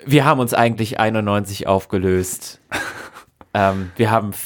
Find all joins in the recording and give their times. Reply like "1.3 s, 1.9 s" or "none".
none